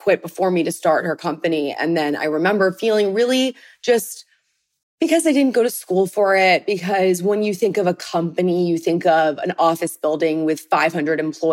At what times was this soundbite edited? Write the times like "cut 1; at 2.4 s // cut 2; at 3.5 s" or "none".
cut 1; at 4.8 s

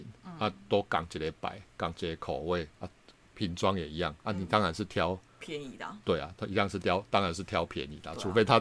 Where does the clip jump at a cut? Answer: cut 1; at 5.3 s

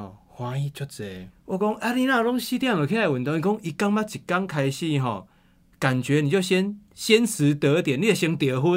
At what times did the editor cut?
cut 1; at 1.3 s

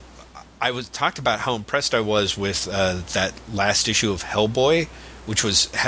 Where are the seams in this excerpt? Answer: none

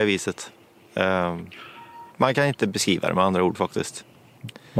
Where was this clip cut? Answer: cut 1; at 2.1 s

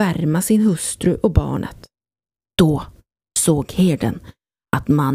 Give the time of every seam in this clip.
cut 1; at 2.4 s

